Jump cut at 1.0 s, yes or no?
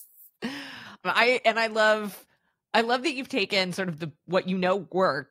yes